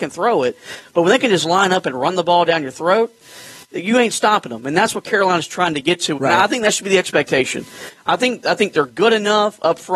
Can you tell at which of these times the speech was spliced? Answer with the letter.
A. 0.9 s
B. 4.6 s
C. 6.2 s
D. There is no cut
C